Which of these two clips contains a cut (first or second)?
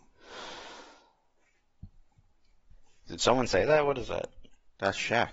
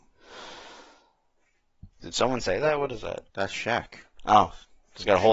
second